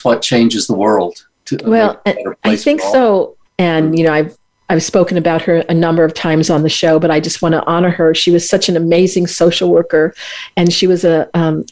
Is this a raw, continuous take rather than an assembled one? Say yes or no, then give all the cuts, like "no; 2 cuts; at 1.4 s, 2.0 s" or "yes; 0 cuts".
no; 1 cut; at 3.5 s